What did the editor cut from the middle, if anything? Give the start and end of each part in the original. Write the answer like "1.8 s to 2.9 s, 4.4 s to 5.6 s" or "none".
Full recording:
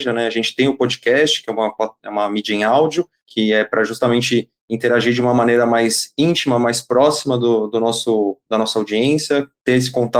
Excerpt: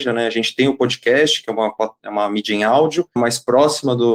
3.2 s to 6.6 s